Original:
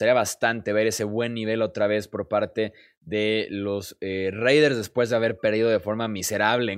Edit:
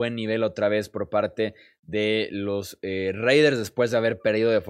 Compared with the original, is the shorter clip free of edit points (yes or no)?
yes